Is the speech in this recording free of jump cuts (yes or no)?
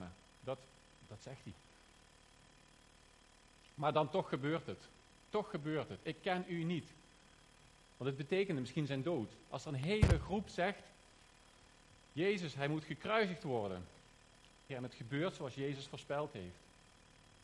no